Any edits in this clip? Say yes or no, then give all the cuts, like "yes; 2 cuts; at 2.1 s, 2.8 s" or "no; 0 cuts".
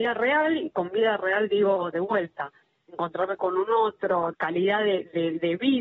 yes; 1 cut; at 4.3 s